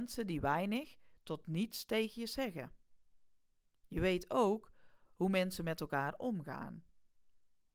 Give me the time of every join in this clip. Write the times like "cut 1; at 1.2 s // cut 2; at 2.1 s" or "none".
cut 1; at 3.8 s